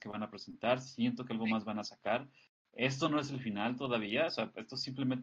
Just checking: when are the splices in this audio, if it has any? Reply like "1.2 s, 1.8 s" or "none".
none